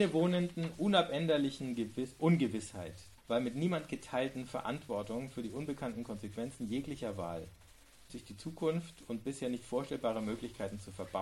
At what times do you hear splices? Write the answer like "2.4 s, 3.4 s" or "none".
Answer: 3.2 s, 8.1 s